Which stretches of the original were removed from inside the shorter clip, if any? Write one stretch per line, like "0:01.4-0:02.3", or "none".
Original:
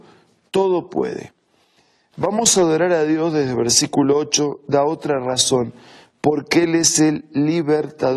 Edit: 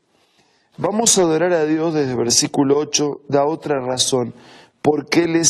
none